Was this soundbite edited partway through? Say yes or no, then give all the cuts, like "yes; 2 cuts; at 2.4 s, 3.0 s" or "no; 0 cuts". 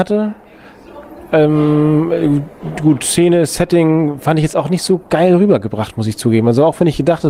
no; 0 cuts